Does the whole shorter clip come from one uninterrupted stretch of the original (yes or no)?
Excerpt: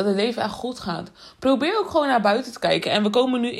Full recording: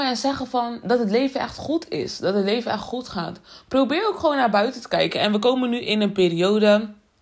yes